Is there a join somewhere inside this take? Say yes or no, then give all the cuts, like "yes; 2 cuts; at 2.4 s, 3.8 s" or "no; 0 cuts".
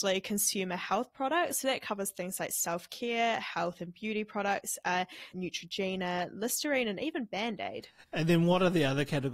yes; 1 cut; at 5.3 s